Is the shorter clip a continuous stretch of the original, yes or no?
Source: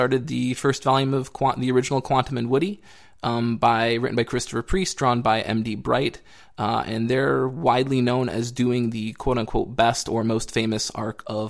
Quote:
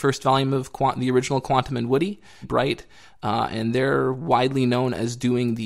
no